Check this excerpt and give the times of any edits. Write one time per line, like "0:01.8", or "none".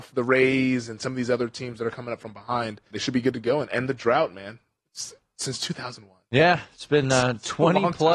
0:02.9